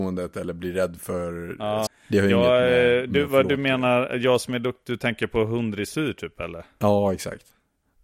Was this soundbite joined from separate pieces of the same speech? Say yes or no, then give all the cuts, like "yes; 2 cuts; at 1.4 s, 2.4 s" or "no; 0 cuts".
yes; 1 cut; at 1.9 s